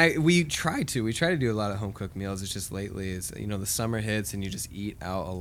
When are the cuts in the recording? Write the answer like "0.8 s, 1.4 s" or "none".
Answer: none